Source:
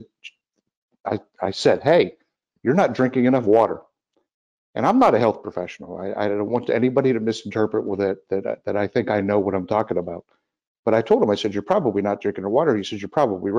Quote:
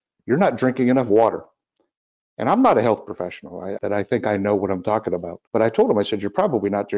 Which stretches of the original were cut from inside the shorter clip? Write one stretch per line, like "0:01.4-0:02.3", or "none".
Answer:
0:06.2-0:08.6
0:10.3-0:10.8